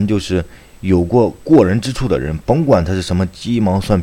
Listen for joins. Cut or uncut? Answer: uncut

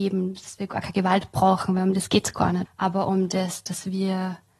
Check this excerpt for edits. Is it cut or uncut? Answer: cut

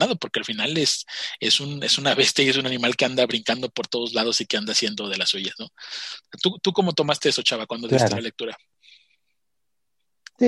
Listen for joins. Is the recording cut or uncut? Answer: uncut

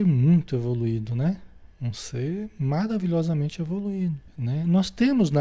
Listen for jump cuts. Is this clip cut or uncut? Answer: cut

